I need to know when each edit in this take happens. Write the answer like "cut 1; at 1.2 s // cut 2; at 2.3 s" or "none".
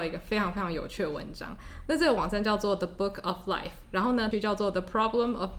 cut 1; at 4.3 s